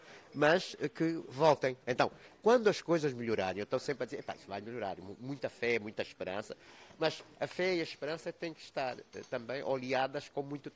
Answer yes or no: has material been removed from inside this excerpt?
yes